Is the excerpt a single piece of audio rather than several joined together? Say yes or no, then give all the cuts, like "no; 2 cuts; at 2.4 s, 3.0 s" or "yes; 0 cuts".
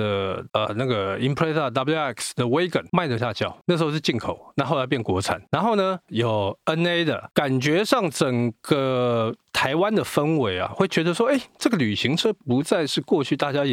no; 2 cuts; at 3.2 s, 6.1 s